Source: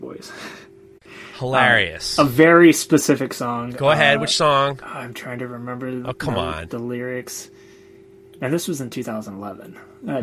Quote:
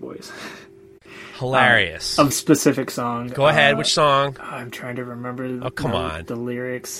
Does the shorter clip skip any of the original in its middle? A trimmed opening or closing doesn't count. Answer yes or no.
yes